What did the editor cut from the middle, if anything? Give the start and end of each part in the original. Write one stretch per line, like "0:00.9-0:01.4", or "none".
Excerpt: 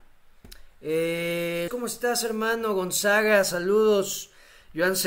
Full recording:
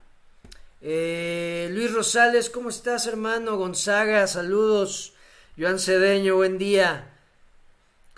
0:01.7-0:02.5

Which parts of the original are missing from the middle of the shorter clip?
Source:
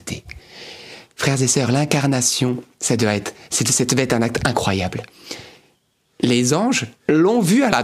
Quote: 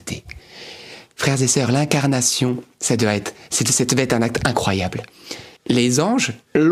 0:05.6-0:06.1

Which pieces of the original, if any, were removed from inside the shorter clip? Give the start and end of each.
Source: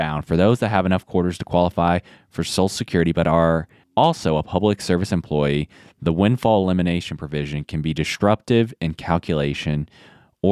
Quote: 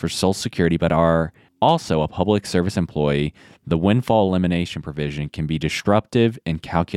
none

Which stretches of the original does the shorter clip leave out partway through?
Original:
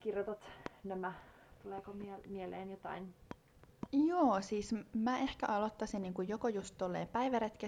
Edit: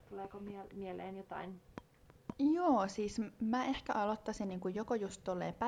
none

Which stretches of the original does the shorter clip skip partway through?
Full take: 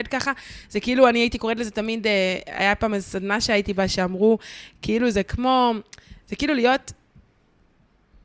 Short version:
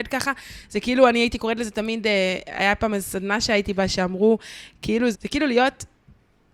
0:05.1-0:06.2

